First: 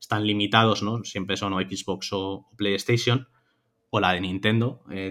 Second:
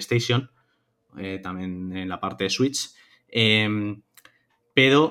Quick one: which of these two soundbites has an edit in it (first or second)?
second